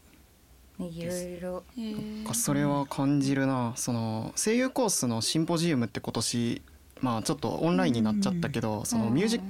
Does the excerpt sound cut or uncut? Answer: uncut